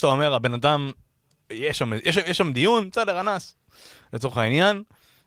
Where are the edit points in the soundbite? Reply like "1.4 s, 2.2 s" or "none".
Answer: 1.5 s